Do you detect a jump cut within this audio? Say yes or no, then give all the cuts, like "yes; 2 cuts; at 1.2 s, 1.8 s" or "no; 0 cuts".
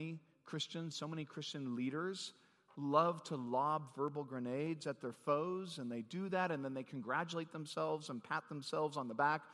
yes; 1 cut; at 0.9 s